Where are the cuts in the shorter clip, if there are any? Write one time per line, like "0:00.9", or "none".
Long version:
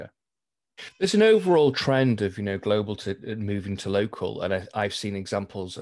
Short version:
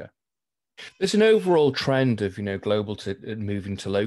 none